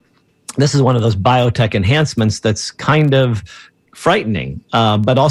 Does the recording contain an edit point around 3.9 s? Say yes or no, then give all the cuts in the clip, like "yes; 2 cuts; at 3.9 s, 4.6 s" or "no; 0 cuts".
no; 0 cuts